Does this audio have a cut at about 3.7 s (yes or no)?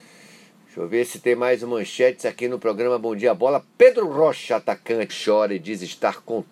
no